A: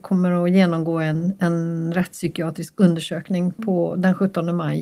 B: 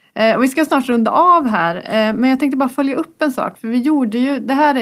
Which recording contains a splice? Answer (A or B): A